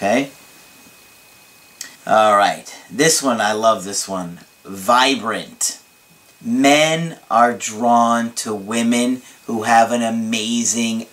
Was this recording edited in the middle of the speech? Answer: yes; 1 cut; at 2.0 s

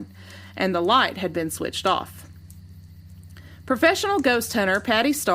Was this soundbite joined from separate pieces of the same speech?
no; 0 cuts

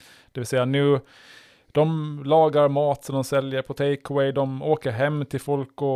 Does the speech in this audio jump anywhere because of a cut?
no; 0 cuts

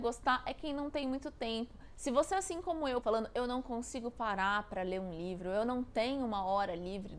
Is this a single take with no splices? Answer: no; 1 cut; at 3.0 s

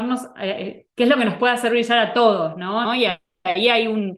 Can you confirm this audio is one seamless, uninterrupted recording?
no; 1 cut; at 2.8 s

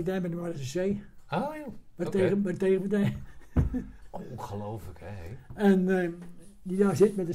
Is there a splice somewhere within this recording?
no; 0 cuts

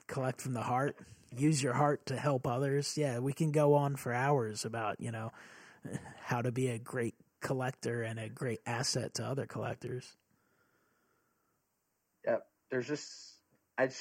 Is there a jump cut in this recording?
no; 0 cuts

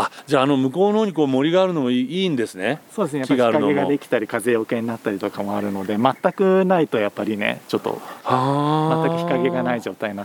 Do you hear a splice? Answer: no; 0 cuts

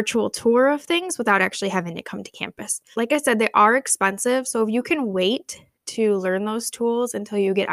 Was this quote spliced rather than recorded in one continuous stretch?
yes; 1 cut; at 2.9 s

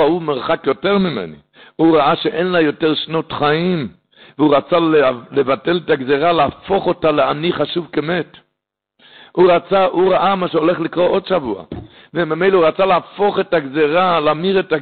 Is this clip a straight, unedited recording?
yes; 0 cuts

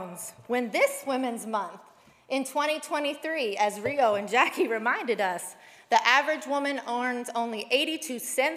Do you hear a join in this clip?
no; 0 cuts

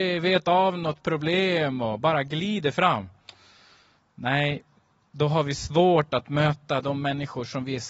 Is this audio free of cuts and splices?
yes; 0 cuts

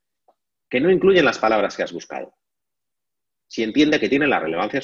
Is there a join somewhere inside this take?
no; 0 cuts

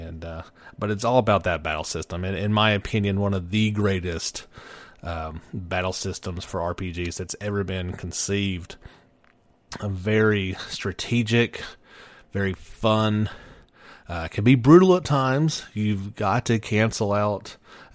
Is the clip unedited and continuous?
yes; 0 cuts

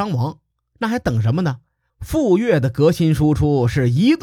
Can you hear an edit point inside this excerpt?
yes; 1 cut; at 1.9 s

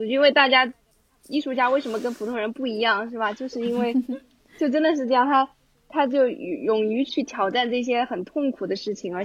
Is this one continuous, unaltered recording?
no; 1 cut; at 7.1 s

